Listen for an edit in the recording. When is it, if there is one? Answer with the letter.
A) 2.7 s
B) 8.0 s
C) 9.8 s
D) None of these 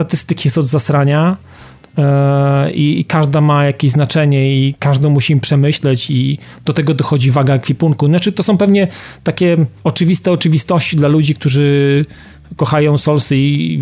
C